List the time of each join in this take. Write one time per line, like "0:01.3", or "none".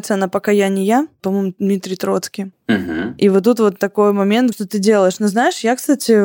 0:02.5
0:04.5